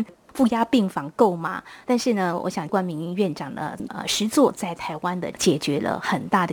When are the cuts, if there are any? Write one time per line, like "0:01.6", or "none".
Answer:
0:01.8
0:03.9

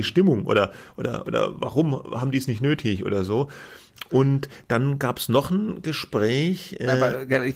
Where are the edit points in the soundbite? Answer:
none

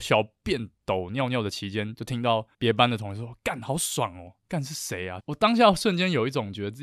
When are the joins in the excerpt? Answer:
0:02.5
0:05.2

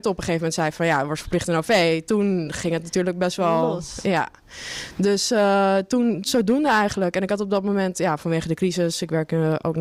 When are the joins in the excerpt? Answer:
none

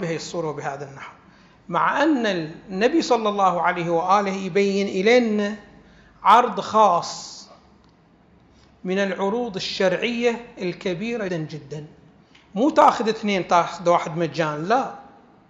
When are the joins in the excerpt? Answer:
0:11.3

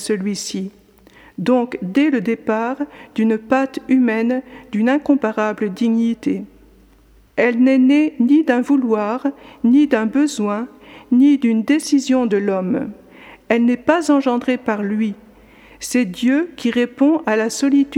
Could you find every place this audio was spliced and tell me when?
0:07.3

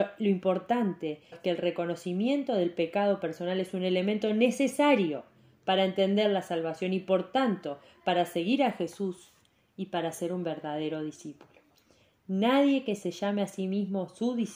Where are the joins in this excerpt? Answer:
0:01.3

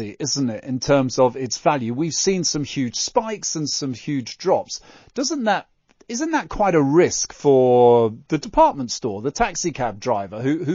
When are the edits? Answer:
none

